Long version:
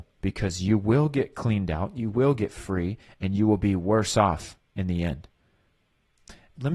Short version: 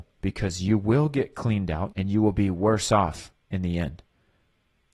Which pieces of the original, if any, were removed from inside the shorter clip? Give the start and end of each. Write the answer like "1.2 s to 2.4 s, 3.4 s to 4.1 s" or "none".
1.9 s to 3.2 s